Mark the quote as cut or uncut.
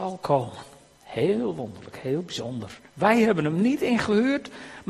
cut